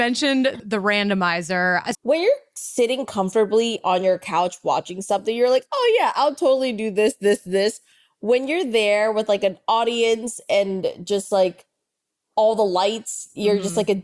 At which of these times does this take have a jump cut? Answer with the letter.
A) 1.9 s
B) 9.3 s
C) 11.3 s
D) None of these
A